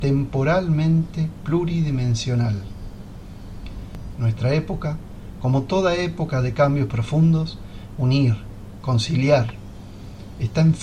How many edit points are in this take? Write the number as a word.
two